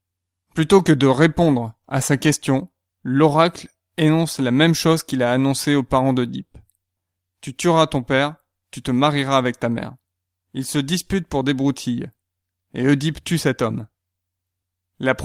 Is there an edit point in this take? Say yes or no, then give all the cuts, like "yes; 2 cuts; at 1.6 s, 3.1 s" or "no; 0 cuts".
yes; 1 cut; at 10.4 s